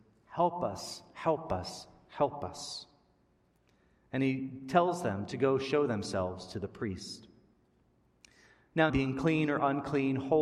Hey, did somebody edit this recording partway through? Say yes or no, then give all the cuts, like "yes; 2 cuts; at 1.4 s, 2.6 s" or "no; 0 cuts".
yes; 1 cut; at 8.9 s